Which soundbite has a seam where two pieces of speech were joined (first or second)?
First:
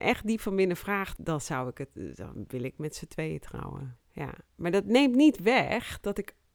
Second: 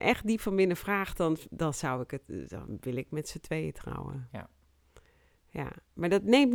first